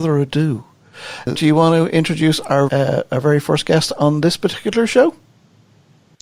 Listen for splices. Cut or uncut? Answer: cut